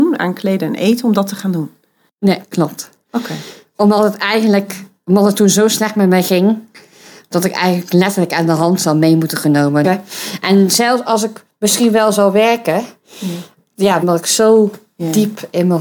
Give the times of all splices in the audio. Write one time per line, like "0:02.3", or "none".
0:09.8
0:14.0